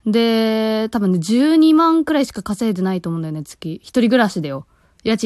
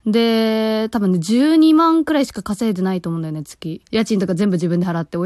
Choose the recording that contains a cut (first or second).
second